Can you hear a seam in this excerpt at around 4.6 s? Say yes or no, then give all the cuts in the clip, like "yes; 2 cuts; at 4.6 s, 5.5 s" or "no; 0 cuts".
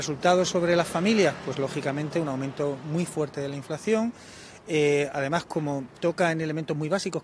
no; 0 cuts